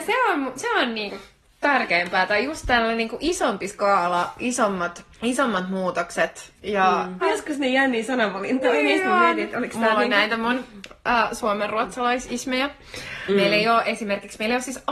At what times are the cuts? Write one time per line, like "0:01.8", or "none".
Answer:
0:05.1
0:07.2
0:13.3